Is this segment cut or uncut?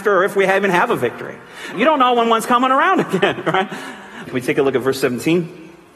cut